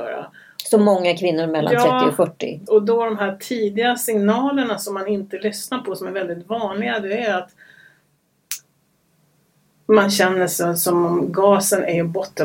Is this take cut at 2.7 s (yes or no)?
yes